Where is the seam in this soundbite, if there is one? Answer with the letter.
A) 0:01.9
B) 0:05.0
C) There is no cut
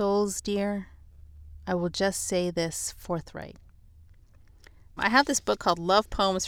B